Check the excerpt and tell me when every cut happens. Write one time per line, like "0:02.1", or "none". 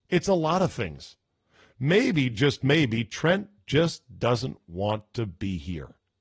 none